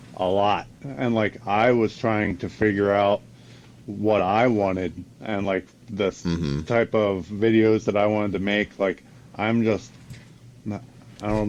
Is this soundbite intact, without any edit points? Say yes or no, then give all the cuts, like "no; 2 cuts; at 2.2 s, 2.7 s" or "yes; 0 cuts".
yes; 0 cuts